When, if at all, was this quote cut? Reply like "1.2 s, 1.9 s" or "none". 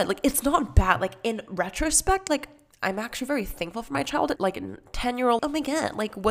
4.4 s, 5.4 s